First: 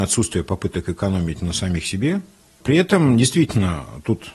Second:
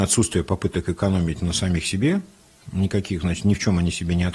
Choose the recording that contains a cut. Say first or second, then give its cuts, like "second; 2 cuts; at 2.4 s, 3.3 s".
first; 1 cut; at 2.6 s